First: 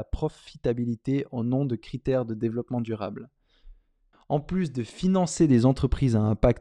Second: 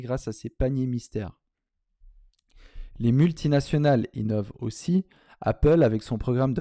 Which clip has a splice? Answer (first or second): first